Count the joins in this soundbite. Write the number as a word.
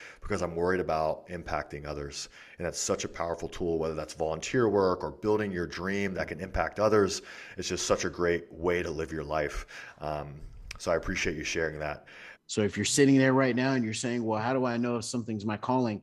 one